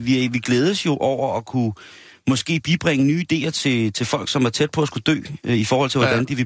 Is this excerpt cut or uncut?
uncut